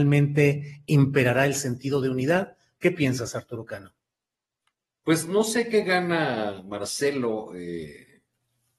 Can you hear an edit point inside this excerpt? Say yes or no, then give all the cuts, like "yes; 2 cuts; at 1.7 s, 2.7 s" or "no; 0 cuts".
no; 0 cuts